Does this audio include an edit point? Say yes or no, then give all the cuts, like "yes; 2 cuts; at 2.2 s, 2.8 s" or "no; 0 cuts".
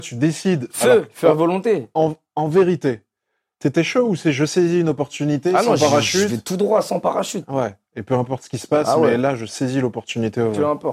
no; 0 cuts